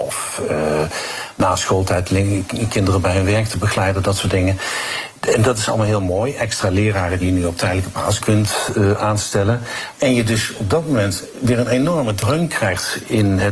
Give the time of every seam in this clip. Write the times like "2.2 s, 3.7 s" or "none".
8.2 s, 9.9 s